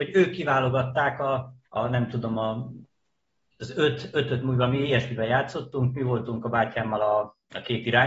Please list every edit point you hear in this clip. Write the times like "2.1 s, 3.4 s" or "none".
1.6 s

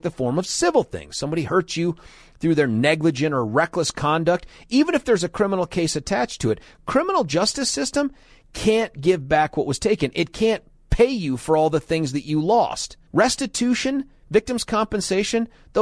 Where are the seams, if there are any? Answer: 13.1 s

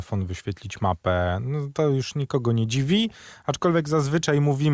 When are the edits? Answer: none

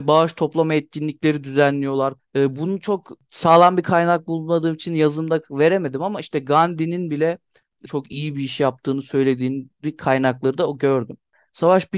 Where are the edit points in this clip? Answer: 2.2 s, 7.9 s

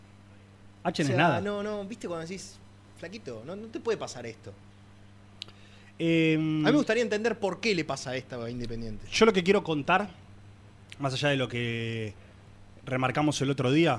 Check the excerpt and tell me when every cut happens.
none

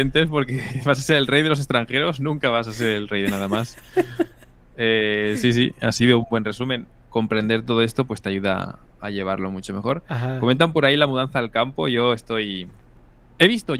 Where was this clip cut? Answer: 7.0 s

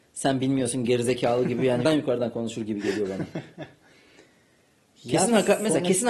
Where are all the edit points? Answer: 1.8 s

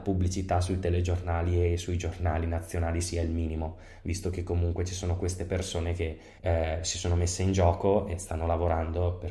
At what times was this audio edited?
6.4 s

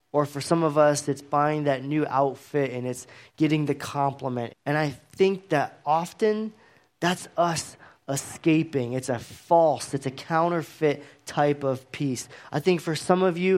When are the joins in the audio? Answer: 4.5 s

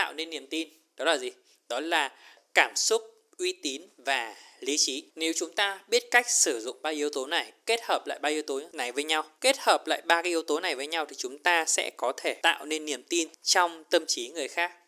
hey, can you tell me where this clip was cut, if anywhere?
5.1 s

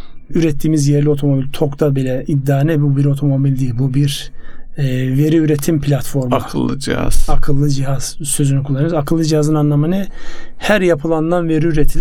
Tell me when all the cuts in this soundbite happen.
none

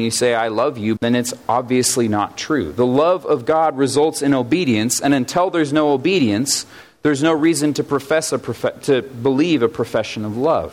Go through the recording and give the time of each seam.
1.0 s

